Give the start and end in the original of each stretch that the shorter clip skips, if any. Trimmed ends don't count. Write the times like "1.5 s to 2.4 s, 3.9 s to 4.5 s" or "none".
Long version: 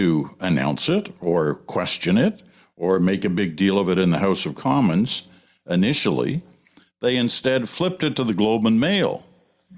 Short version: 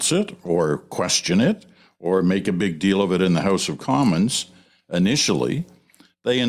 none